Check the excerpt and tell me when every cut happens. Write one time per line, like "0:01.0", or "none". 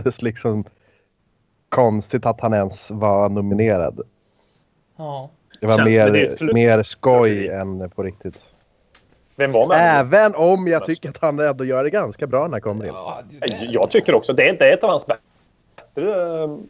none